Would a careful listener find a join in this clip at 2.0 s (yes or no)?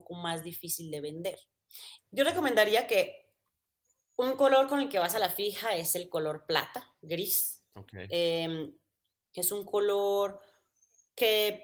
yes